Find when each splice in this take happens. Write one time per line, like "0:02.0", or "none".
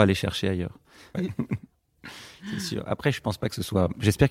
0:01.1